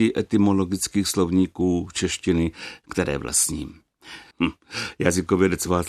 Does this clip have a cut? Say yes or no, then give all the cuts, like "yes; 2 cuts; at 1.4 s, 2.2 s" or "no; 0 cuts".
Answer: yes; 1 cut; at 4.3 s